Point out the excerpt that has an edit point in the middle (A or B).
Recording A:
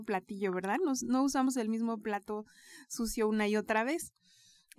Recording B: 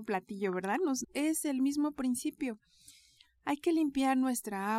B